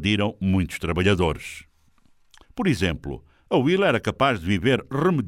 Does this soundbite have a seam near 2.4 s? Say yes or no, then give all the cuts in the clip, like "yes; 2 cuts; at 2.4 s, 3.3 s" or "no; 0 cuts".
yes; 1 cut; at 2.4 s